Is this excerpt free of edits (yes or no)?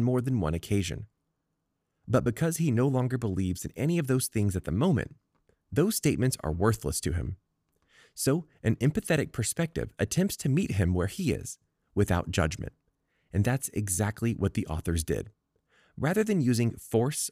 yes